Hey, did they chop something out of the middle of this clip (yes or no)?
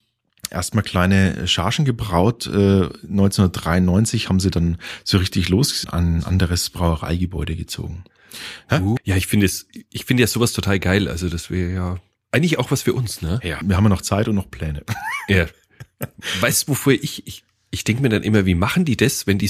yes